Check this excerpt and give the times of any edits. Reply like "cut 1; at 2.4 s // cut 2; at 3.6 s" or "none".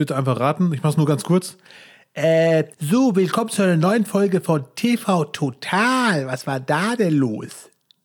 cut 1; at 2.7 s